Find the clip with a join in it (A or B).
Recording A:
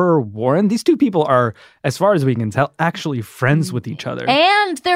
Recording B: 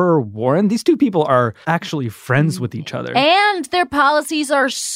B